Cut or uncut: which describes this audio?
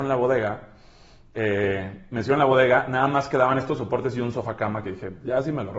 uncut